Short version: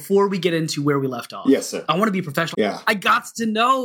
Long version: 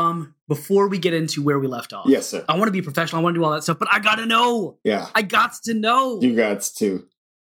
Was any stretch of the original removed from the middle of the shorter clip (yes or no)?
yes